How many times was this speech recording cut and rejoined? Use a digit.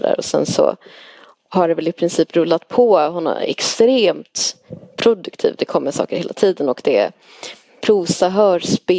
1